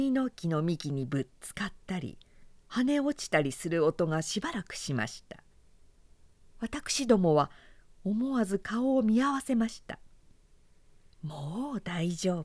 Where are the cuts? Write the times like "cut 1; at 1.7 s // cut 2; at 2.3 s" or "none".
none